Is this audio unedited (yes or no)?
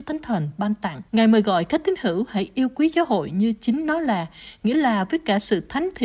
no